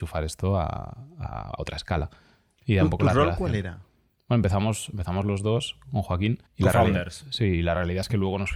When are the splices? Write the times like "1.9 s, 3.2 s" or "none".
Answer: 6.5 s